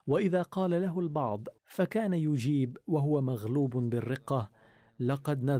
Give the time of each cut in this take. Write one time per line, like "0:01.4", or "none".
0:01.6